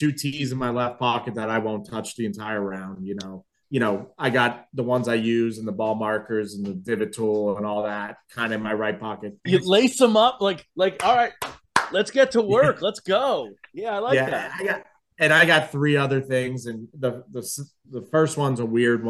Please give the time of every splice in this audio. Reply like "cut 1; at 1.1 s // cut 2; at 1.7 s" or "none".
cut 1; at 3.6 s // cut 2; at 9.5 s